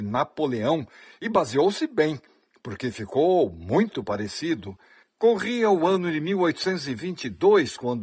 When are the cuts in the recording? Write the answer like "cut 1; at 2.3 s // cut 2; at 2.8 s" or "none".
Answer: cut 1; at 5.1 s